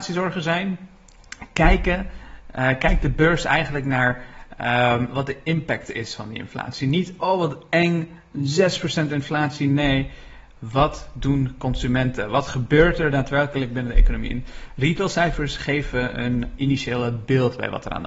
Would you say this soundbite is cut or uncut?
uncut